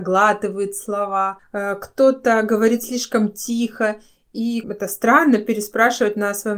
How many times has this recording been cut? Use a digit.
2